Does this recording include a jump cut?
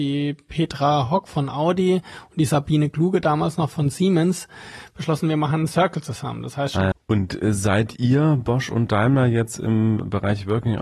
yes; 1 cut; at 6.9 s

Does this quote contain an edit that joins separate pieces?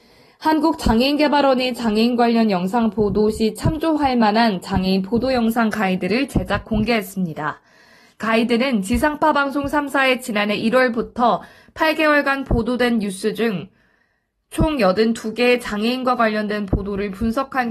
no; 0 cuts

